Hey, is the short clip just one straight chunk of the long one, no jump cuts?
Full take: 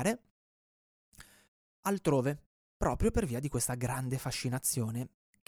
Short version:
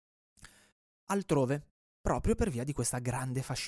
yes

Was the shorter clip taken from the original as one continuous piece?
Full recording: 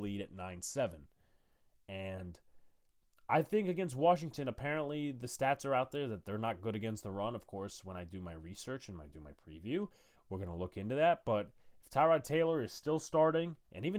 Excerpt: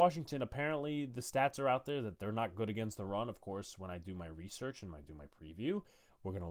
yes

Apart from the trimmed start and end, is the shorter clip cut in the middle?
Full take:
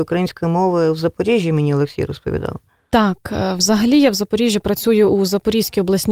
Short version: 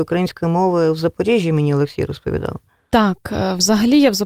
no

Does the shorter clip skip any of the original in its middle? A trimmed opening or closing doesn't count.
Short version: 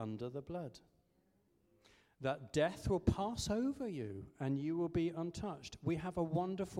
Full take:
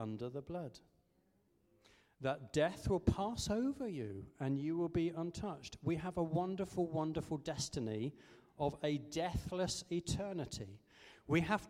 no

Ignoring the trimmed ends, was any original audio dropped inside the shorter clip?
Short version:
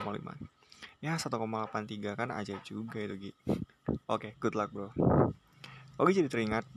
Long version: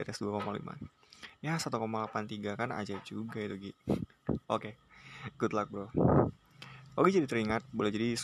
yes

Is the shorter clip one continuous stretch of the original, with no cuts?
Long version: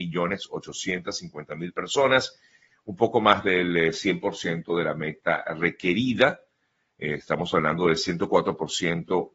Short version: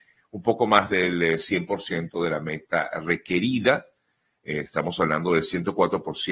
yes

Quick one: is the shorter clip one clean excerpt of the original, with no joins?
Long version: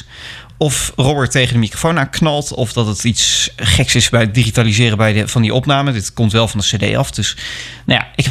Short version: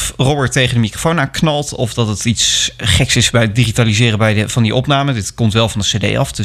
yes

